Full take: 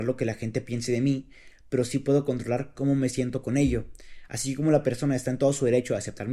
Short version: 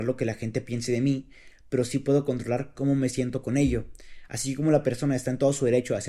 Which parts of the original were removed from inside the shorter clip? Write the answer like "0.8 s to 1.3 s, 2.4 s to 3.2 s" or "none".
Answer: none